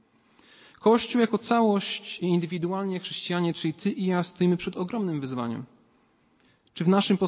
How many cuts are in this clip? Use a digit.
0